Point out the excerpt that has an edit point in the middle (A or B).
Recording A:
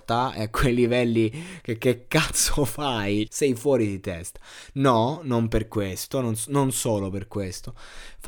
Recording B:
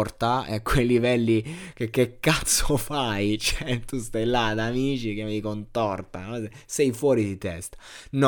A